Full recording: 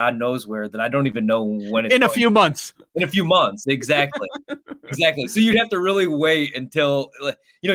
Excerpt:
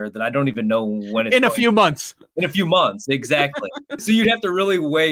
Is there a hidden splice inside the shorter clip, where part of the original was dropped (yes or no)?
yes